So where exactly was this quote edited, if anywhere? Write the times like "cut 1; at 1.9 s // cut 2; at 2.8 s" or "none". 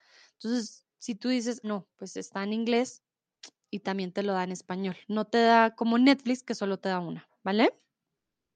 cut 1; at 1.6 s

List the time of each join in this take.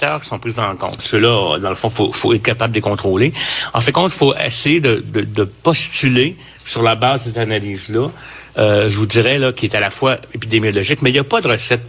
cut 1; at 1.0 s

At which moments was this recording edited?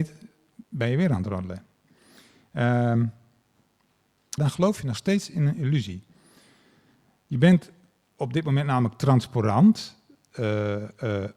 cut 1; at 4.4 s

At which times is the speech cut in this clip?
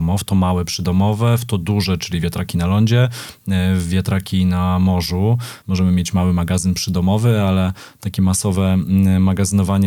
cut 1; at 5.6 s

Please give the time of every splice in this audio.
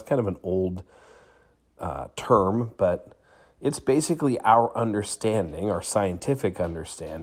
none

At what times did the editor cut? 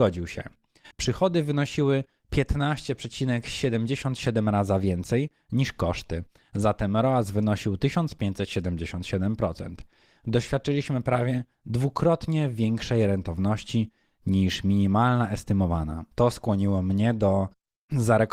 cut 1; at 0.9 s // cut 2; at 16.1 s

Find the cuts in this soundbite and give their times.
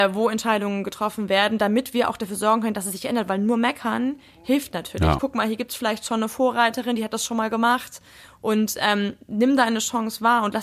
cut 1; at 5.2 s

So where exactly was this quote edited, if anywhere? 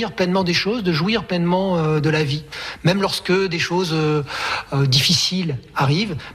none

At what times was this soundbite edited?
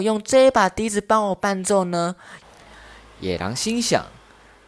cut 1; at 2.4 s

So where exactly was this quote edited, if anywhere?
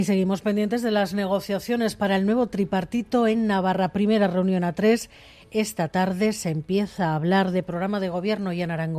none

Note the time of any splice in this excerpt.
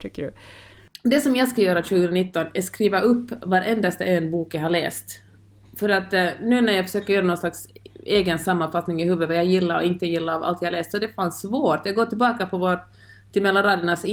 none

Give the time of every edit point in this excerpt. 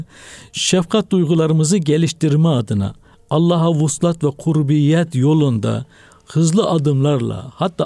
none

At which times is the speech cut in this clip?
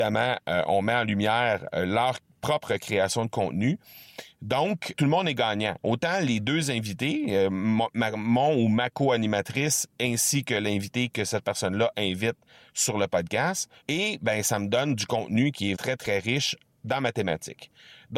cut 1; at 4.9 s // cut 2; at 13.8 s // cut 3; at 15.7 s

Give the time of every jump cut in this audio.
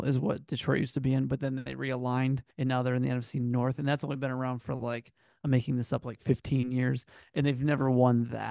cut 1; at 2.5 s

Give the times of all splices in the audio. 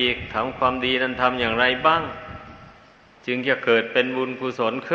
none

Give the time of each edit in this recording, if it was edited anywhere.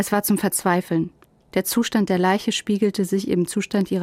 none

